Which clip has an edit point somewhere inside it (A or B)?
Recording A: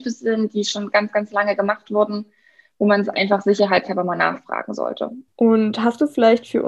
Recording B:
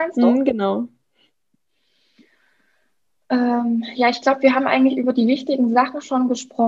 A